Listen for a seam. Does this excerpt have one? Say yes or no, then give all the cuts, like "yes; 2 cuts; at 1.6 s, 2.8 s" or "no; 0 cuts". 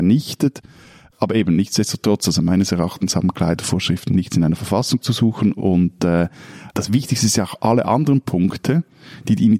yes; 1 cut; at 1.1 s